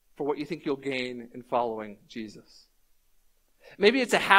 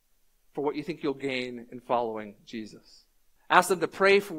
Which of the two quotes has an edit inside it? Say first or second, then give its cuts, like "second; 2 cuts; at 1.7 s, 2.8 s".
second; 1 cut; at 3.4 s